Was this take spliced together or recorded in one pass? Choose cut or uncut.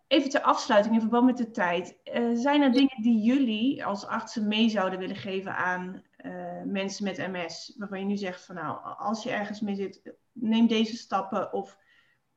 uncut